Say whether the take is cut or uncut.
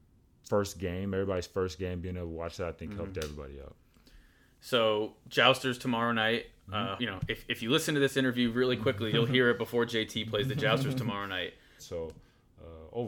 cut